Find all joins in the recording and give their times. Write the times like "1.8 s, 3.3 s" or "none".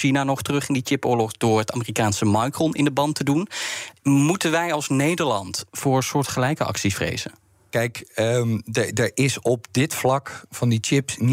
none